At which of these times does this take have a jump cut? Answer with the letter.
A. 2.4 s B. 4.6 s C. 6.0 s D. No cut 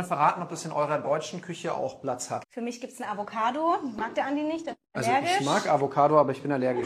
A